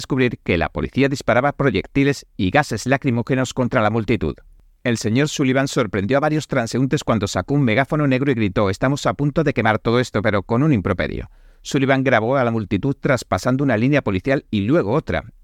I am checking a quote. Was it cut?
no; 0 cuts

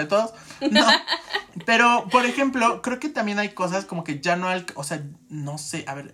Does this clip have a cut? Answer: no; 0 cuts

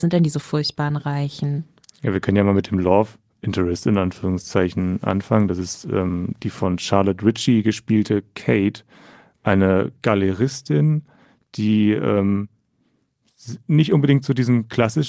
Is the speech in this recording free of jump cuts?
yes; 0 cuts

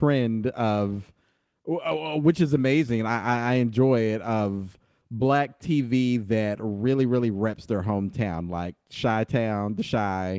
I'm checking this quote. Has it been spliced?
no; 0 cuts

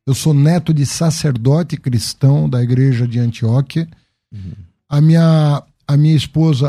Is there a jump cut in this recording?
no; 0 cuts

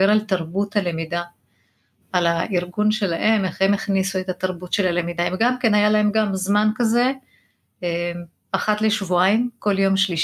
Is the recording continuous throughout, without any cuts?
yes; 0 cuts

